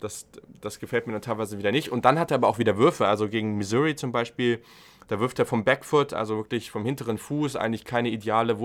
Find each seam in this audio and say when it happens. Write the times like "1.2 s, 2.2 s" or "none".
none

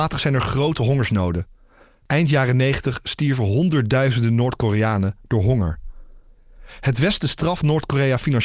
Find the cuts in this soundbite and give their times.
none

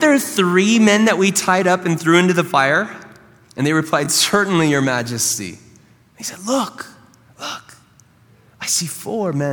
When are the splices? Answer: none

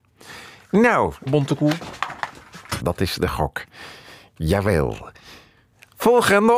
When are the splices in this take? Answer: 1.3 s, 2.8 s

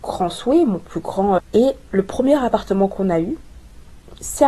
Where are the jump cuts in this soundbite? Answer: 1.4 s

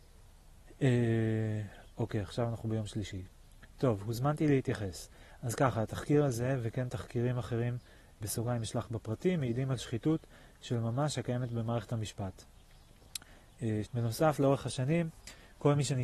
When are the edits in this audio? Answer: 8.2 s, 13.8 s

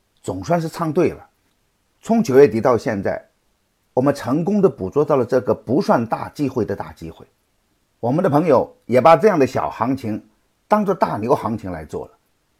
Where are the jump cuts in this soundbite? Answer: none

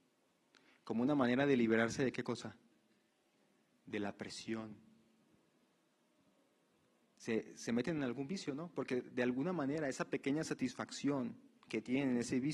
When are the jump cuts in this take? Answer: none

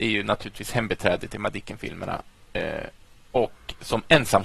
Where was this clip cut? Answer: none

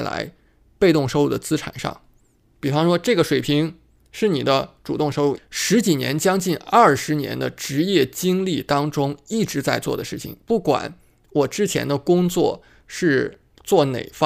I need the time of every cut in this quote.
5.4 s

